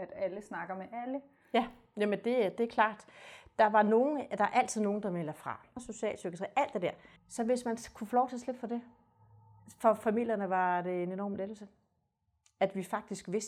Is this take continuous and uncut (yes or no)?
no